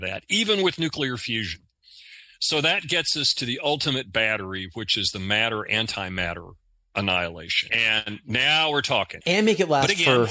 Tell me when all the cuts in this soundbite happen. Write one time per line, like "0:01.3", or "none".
0:07.7
0:09.2